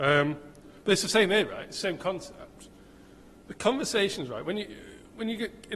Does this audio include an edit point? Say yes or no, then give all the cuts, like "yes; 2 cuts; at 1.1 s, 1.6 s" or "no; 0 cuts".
yes; 1 cut; at 3.4 s